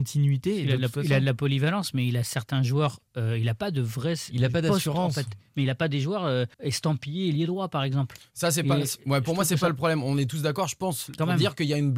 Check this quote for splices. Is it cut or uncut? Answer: cut